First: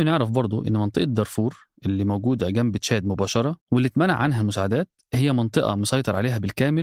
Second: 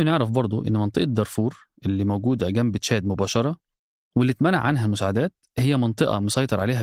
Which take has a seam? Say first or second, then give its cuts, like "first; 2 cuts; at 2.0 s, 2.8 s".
first; 1 cut; at 3.6 s